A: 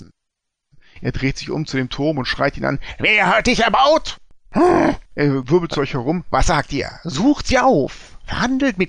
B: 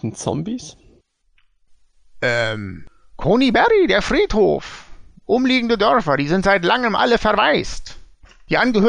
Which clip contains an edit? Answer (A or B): A